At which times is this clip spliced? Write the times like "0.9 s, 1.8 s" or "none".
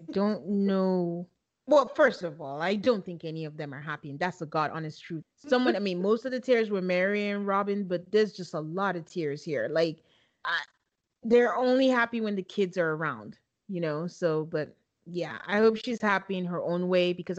5.2 s